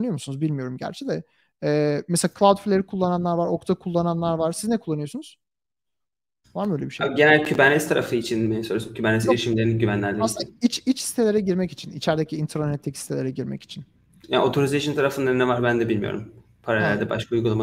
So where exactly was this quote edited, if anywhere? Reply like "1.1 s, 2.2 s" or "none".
none